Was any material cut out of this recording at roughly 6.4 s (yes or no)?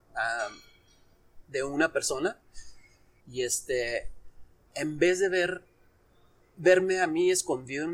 no